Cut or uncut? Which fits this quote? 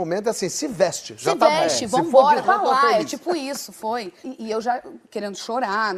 cut